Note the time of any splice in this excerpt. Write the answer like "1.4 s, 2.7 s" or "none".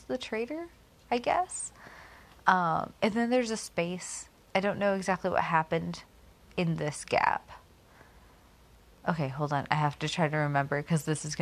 none